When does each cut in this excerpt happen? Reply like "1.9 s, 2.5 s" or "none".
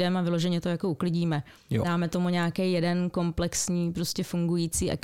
none